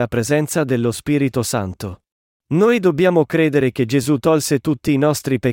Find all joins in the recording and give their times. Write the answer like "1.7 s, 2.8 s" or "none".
2.3 s